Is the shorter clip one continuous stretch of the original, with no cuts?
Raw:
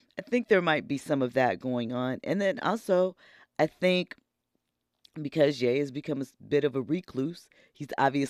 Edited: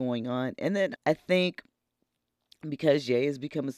no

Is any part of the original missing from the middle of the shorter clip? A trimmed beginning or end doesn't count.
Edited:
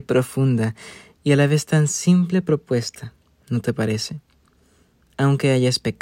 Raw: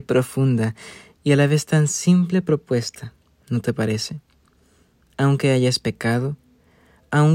no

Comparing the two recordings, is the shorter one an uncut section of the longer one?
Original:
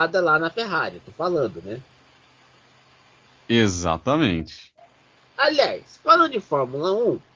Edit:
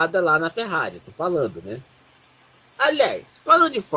no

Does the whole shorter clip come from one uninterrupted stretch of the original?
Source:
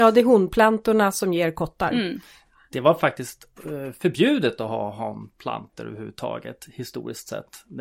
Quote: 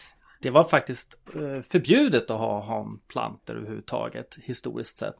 yes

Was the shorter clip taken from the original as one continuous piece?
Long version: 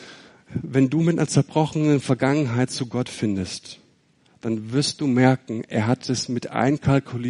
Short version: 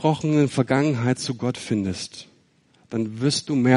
yes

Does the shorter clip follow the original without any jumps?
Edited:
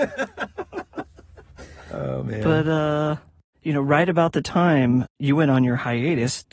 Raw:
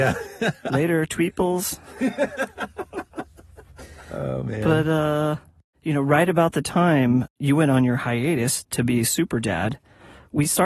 yes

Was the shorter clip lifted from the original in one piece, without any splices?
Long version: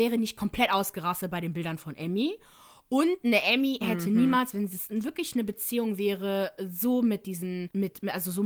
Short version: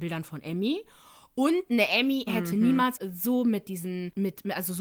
no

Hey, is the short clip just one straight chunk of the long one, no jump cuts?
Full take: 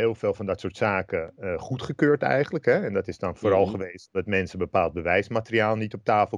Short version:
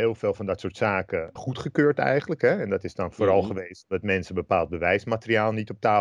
no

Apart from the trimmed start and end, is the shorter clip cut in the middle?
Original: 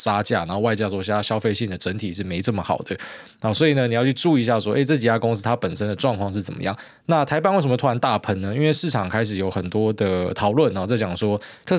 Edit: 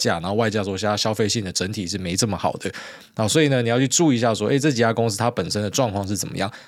no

